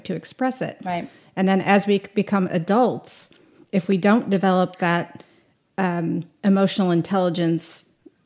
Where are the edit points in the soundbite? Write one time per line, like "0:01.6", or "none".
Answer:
none